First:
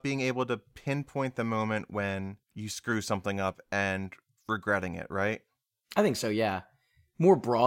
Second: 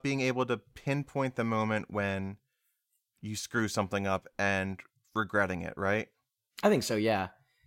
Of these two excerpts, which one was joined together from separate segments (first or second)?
first